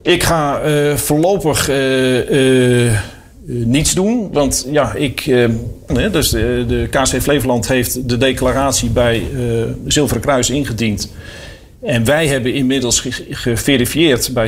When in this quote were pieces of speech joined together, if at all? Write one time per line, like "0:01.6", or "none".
0:05.9